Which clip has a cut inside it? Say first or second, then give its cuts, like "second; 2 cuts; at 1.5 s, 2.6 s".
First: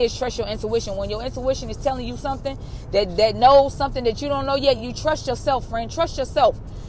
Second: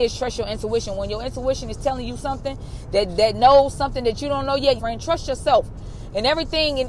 second; 1 cut; at 4.8 s